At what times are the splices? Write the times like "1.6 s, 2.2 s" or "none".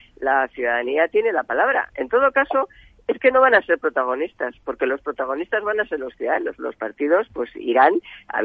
1.9 s, 6.6 s